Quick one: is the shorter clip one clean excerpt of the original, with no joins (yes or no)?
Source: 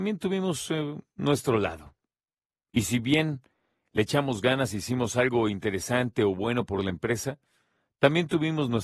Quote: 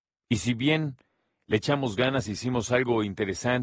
yes